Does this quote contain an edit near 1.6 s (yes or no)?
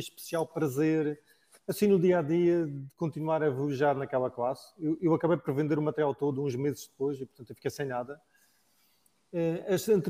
no